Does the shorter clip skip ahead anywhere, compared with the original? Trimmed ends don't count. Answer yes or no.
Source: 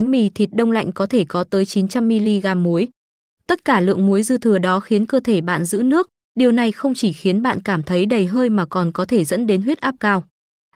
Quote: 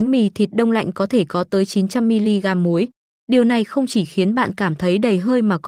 yes